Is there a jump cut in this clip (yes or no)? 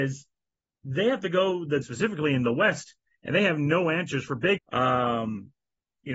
yes